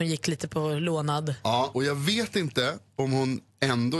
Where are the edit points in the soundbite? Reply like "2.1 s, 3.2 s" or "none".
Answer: none